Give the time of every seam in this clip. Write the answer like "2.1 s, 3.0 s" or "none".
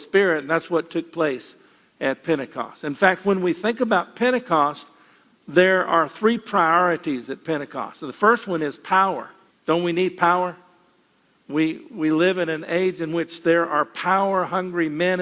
9.5 s